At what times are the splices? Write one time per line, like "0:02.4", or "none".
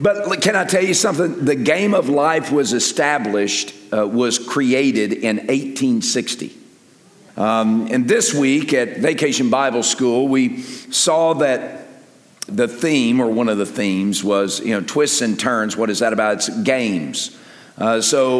0:07.3
0:12.5